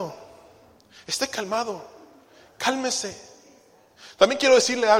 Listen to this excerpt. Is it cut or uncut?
uncut